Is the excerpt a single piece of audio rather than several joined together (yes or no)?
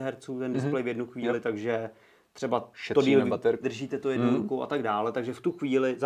no